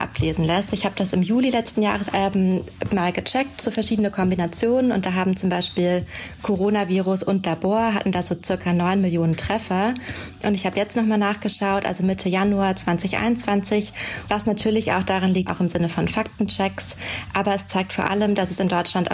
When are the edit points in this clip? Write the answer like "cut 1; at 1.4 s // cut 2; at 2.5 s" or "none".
cut 1; at 2.1 s // cut 2; at 14.3 s // cut 3; at 15.5 s